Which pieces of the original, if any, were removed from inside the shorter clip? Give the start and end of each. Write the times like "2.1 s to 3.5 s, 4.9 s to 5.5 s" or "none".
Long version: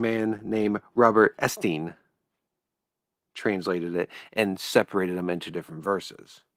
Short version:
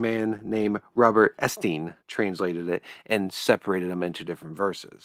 2.0 s to 3.3 s